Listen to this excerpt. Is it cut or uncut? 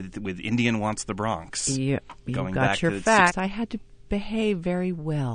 cut